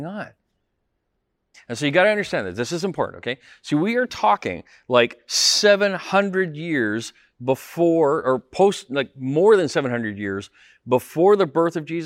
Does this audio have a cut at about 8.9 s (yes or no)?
no